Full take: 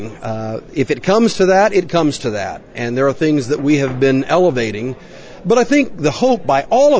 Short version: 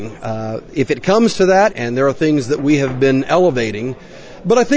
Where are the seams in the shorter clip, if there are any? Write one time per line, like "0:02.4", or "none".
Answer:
0:01.7